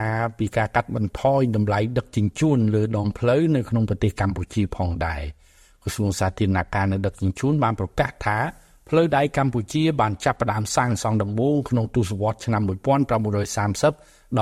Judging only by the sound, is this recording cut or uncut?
uncut